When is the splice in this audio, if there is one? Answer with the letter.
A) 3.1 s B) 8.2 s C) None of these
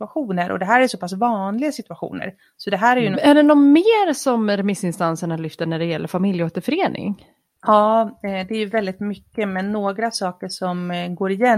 A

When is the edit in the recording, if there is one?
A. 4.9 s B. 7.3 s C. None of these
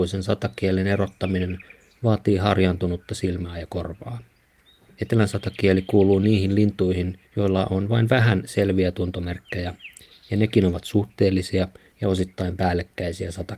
B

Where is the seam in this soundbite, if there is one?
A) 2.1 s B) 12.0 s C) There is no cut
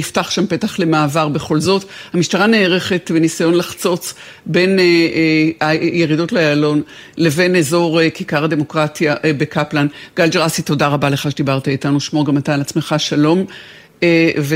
C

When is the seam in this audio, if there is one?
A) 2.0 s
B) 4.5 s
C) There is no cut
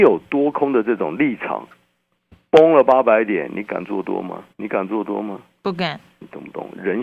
B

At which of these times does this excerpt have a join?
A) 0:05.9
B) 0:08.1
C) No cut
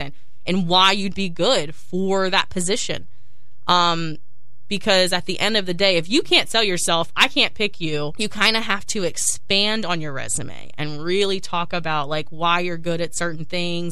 B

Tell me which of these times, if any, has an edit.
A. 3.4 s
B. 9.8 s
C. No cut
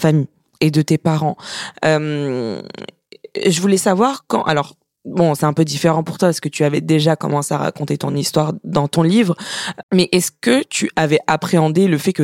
B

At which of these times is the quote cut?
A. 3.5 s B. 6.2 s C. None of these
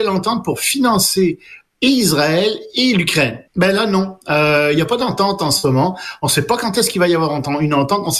A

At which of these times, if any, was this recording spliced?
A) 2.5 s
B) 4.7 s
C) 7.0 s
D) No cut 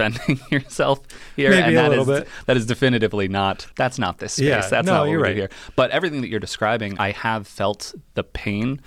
C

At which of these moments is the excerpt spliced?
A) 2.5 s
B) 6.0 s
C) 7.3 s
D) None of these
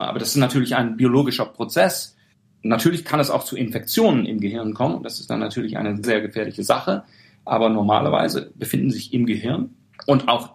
B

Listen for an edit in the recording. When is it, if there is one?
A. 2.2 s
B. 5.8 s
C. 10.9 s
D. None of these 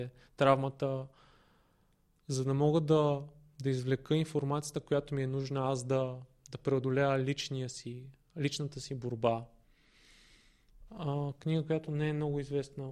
C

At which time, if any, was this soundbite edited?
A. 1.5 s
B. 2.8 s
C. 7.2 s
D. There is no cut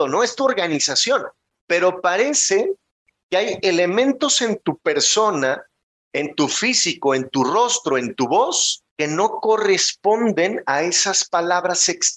A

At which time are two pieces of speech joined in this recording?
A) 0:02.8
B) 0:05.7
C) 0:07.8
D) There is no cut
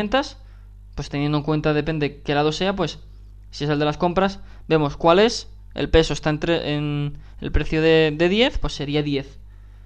D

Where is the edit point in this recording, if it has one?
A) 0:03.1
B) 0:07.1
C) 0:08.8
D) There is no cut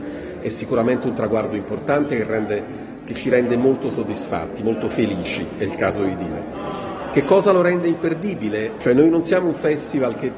C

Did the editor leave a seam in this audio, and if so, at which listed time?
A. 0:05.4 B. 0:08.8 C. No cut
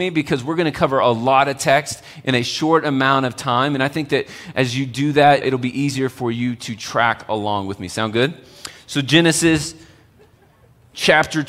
A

